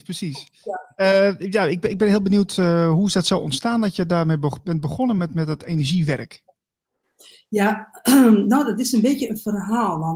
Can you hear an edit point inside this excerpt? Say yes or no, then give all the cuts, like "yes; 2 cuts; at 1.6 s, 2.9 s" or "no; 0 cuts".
no; 0 cuts